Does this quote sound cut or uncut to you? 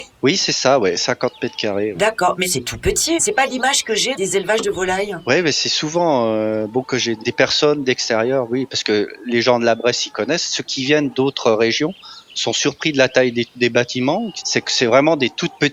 uncut